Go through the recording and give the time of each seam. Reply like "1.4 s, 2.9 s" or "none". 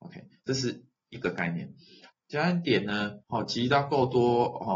2.1 s, 3.2 s

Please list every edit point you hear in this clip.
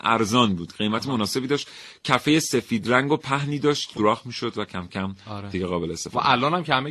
4.0 s

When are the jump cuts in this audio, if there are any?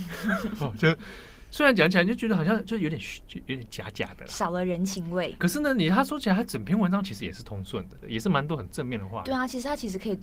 5.4 s, 8.0 s

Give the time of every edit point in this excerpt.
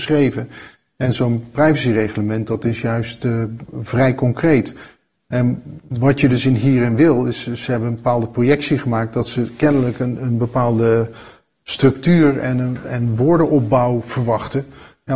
none

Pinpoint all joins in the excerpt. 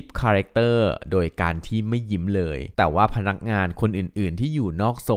2.7 s

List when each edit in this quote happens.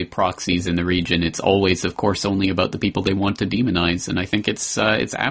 none

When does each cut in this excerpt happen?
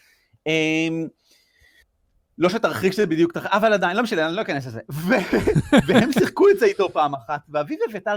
none

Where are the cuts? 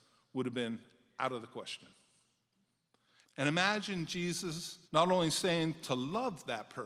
3.2 s, 4.9 s

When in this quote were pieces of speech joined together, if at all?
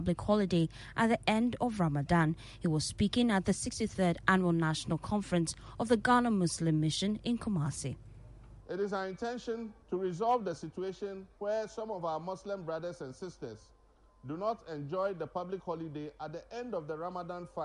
9.8 s, 11.3 s

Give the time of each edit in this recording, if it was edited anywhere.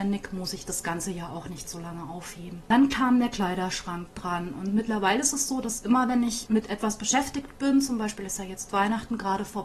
none

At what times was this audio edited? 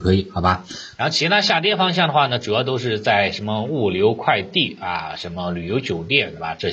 1.0 s

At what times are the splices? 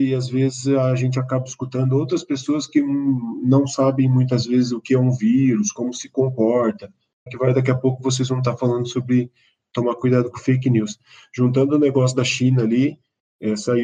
7.3 s

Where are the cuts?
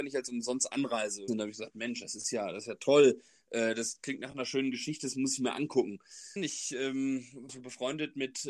1.3 s, 6.4 s, 7.5 s

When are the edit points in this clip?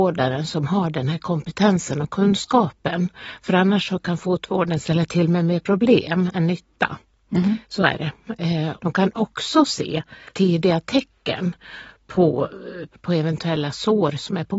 7.6 s, 8.8 s, 12.9 s

